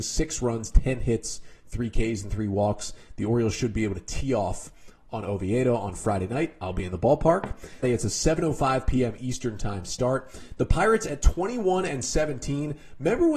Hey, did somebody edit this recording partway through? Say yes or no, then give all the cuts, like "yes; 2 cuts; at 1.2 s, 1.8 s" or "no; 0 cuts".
yes; 1 cut; at 7.8 s